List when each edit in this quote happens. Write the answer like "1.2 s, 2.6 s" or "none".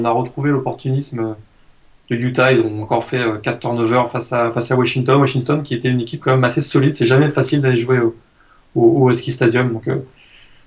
none

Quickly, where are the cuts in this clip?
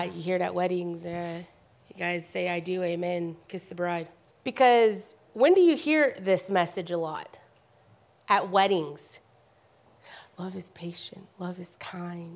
4.3 s

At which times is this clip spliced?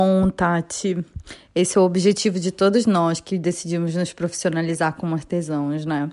none

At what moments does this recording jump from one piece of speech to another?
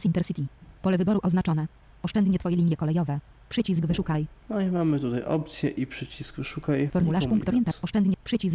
4.4 s, 6.9 s

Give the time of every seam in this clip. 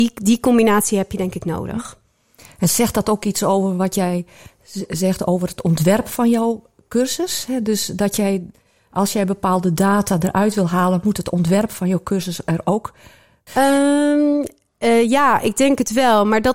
13.5 s

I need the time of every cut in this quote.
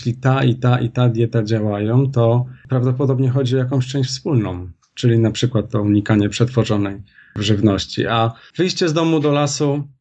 none

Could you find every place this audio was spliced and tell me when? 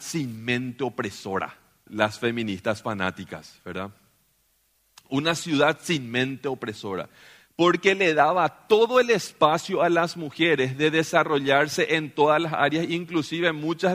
1.9 s

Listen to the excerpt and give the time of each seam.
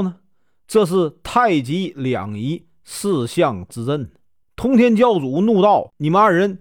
4.4 s

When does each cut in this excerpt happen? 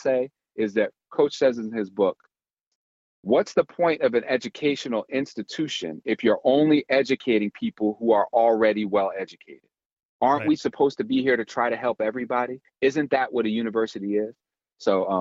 none

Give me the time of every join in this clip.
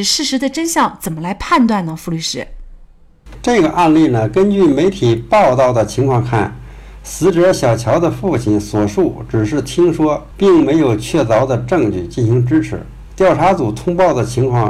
none

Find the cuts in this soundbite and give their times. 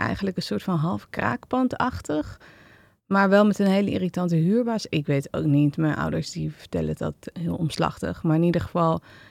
none

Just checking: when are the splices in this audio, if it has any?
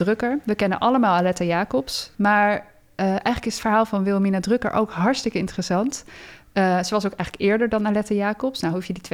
2.1 s

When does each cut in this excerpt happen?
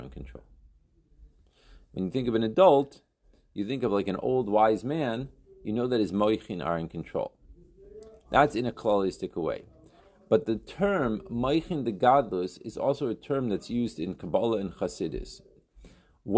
none

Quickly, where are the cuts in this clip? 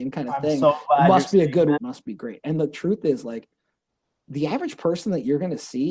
1.7 s

